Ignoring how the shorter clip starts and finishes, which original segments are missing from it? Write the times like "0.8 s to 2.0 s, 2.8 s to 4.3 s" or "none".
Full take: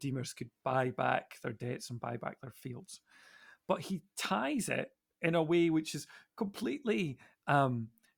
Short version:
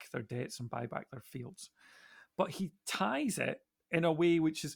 none